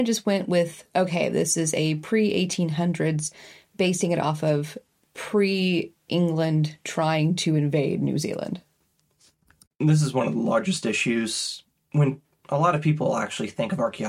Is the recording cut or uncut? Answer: uncut